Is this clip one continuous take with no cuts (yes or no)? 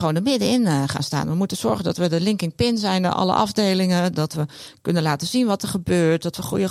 yes